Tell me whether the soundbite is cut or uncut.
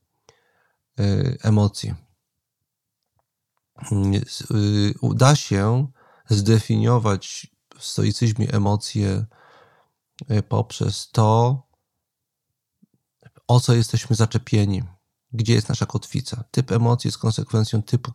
uncut